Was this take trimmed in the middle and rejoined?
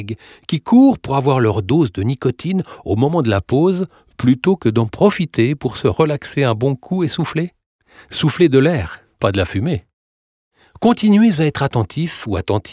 no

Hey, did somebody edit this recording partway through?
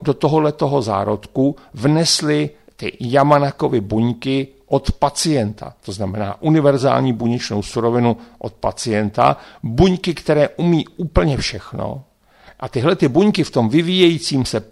no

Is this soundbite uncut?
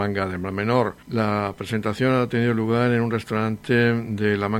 yes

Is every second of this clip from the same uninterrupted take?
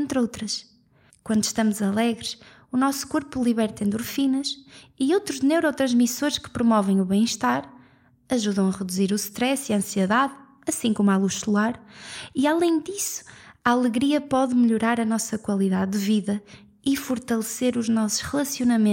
no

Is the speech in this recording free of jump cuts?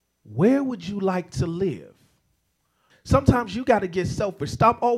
no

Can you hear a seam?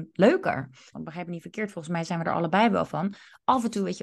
yes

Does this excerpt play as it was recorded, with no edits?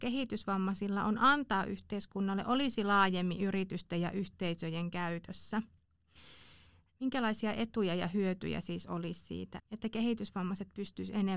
no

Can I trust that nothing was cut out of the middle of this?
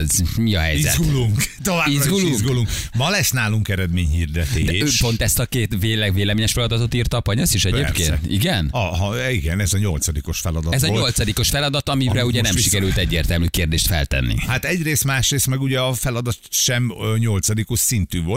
yes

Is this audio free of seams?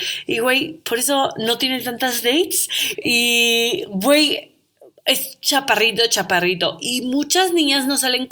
no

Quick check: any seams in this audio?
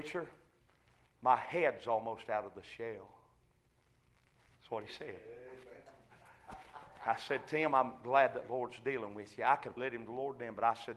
yes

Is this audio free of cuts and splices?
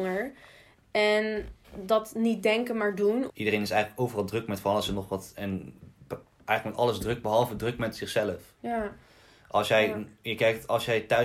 no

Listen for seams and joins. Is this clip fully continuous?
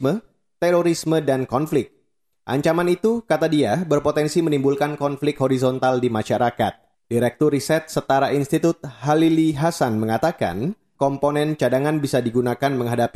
no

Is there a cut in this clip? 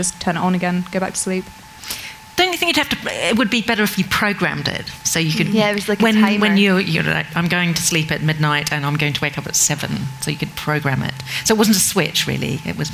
no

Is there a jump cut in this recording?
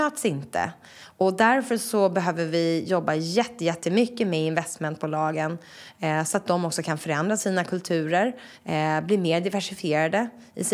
no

